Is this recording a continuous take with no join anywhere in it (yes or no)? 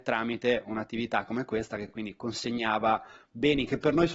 yes